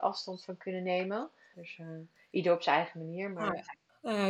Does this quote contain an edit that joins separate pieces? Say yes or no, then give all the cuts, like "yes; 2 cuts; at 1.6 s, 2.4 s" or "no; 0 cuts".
yes; 1 cut; at 1.5 s